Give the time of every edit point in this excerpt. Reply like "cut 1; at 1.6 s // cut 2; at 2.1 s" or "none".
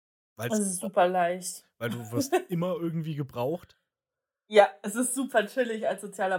none